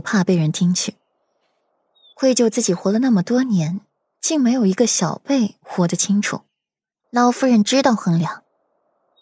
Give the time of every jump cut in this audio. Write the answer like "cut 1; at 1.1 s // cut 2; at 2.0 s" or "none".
cut 1; at 7.0 s